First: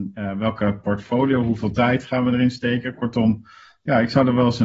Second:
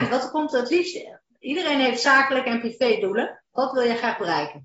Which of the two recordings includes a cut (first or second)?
second